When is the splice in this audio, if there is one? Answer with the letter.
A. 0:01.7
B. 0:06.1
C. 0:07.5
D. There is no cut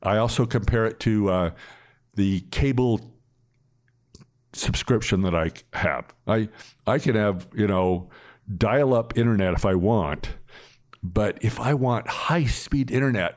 D